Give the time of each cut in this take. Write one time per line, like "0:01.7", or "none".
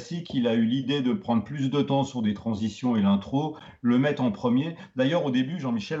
none